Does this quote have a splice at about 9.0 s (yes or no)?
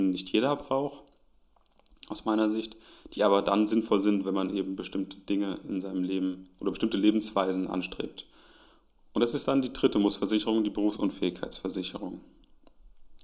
yes